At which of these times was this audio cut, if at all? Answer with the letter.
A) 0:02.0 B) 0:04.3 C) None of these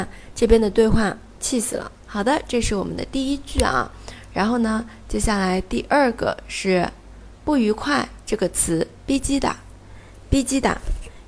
A